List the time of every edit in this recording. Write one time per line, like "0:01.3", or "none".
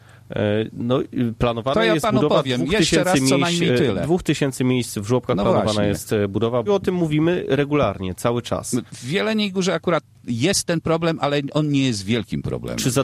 0:06.7
0:08.9